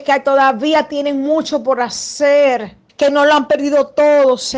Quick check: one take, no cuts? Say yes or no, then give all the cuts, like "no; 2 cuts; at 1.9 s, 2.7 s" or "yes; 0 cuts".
no; 1 cut; at 2.9 s